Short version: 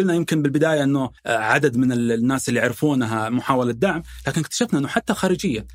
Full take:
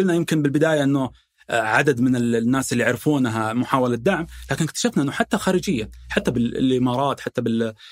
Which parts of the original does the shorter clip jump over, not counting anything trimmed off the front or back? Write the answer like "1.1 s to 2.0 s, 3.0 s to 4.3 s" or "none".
1.2 s to 1.4 s